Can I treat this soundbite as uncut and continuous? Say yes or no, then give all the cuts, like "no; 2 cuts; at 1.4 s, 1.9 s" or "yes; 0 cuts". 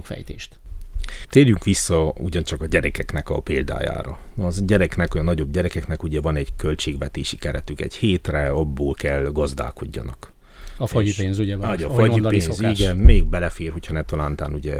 yes; 0 cuts